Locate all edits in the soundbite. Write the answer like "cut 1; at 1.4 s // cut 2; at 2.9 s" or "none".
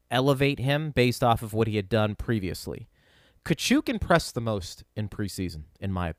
none